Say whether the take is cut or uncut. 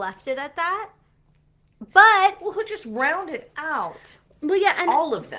cut